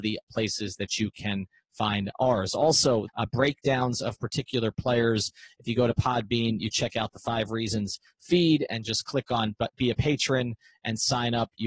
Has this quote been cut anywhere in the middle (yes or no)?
yes